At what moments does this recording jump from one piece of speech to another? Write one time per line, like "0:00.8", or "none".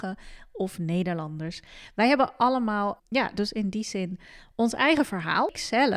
0:03.0